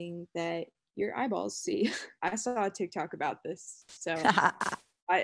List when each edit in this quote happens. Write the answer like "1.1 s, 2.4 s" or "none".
2.2 s